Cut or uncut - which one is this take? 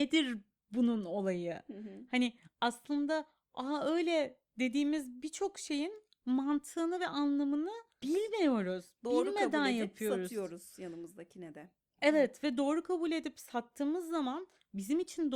cut